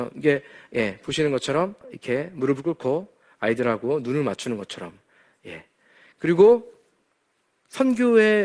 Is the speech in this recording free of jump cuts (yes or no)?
no